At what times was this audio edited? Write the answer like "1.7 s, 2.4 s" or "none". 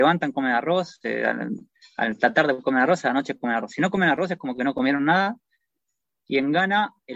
none